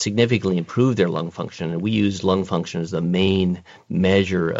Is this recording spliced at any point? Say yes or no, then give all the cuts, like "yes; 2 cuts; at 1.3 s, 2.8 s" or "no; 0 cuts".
no; 0 cuts